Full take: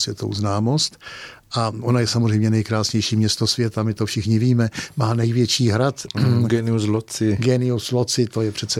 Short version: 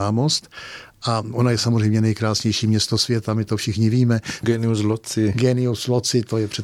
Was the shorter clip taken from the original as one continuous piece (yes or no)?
no